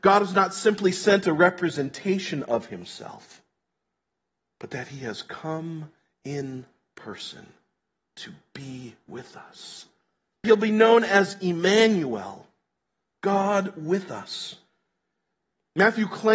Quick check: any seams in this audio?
yes; 1 cut; at 10.4 s

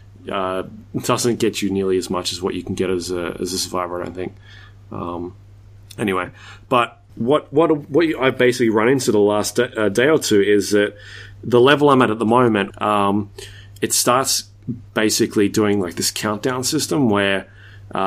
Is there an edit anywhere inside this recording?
yes; 2 cuts; at 7.1 s, 12.7 s

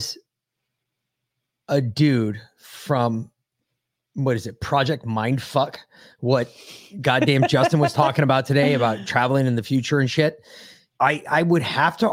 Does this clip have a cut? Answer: yes; 1 cut; at 10.9 s

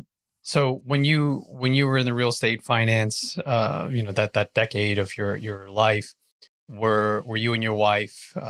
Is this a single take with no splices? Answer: yes; 0 cuts

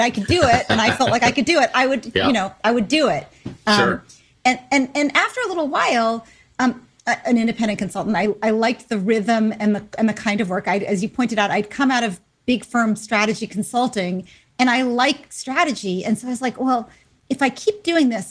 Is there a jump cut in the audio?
yes; 1 cut; at 7.2 s

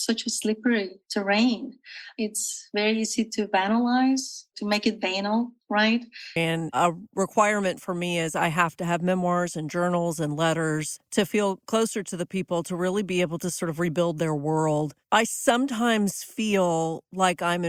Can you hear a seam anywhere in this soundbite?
yes; 1 cut; at 6.4 s

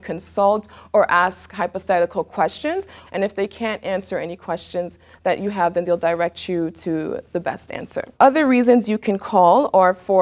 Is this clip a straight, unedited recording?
no; 2 cuts; at 3.0 s, 8.1 s

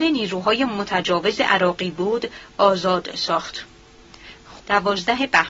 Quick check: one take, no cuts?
no; 1 cut; at 4.6 s

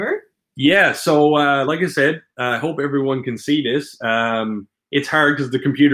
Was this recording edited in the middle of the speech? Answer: no; 0 cuts

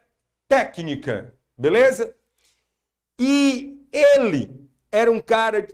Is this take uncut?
yes; 0 cuts

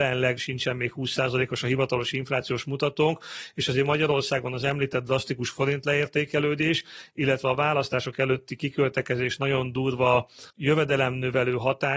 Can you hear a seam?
yes; 1 cut; at 10.5 s

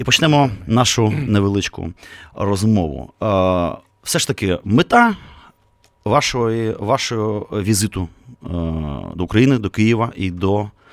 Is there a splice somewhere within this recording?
no; 0 cuts

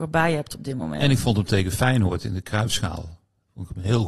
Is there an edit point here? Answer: no; 0 cuts

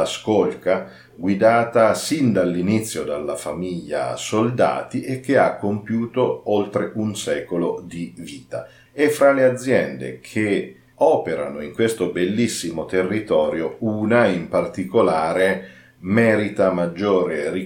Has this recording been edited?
yes; 1 cut; at 8.9 s

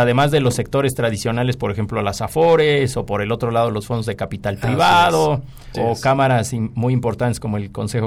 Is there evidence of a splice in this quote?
yes; 1 cut; at 5.7 s

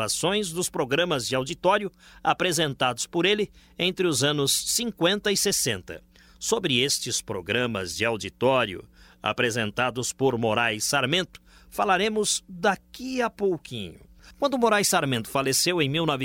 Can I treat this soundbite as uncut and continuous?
yes; 0 cuts

